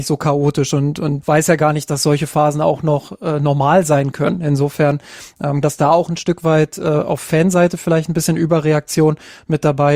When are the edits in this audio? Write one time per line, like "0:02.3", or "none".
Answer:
0:01.2
0:05.6